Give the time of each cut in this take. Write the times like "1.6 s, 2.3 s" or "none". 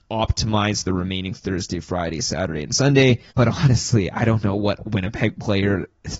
3.3 s